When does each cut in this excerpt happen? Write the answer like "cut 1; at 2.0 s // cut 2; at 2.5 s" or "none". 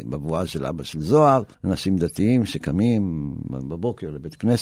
cut 1; at 1.5 s

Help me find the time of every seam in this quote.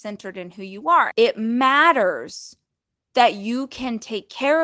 cut 1; at 1.1 s

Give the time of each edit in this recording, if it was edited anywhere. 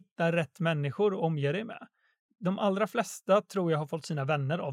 none

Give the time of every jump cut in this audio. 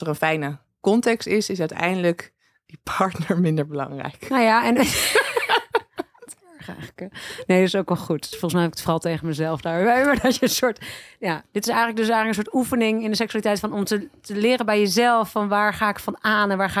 cut 1; at 8.3 s

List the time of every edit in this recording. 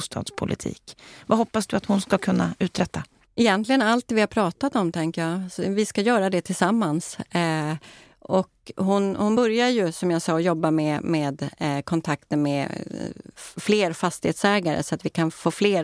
none

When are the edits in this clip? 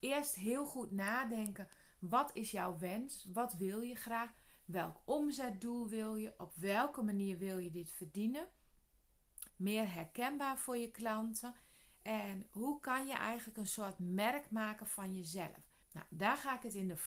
cut 1; at 9.5 s // cut 2; at 15.8 s

